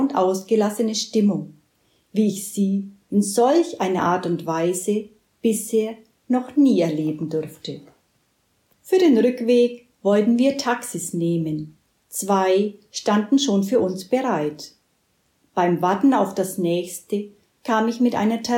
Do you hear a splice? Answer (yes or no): no